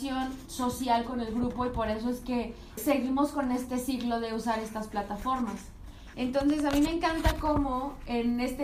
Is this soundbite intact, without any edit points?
no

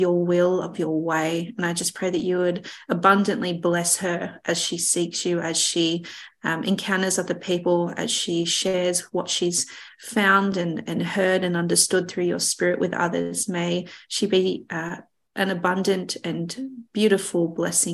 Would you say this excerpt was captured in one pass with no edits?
yes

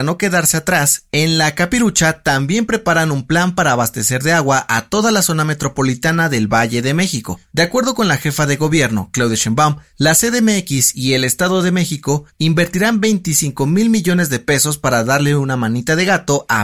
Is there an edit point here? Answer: no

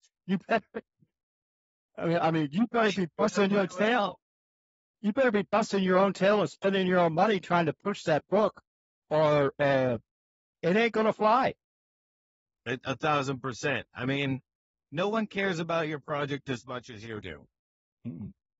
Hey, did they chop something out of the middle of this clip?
no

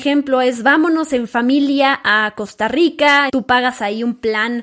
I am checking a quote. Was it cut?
yes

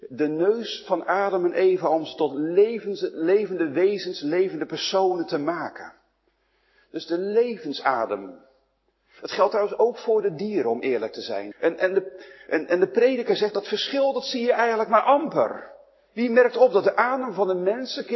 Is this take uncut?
no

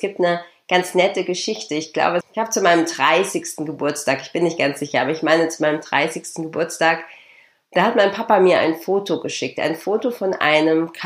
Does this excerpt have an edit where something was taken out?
yes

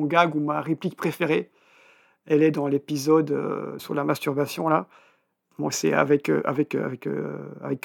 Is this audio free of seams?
no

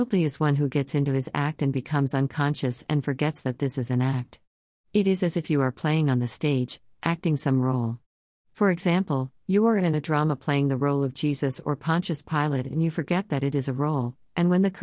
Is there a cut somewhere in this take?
no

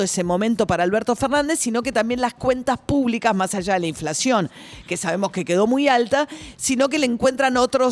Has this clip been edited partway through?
no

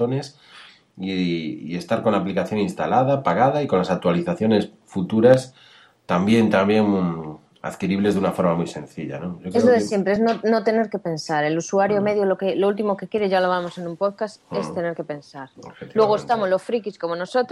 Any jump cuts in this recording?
no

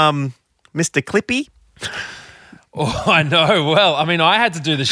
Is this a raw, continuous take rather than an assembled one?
yes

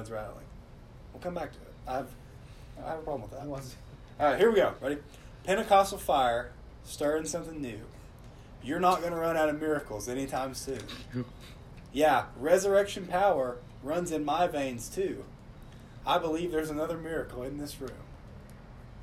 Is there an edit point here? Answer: yes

